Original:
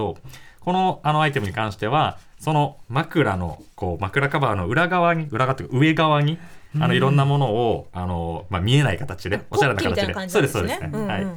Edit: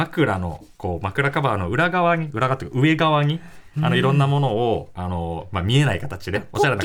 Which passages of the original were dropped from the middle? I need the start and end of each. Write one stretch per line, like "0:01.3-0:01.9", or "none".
none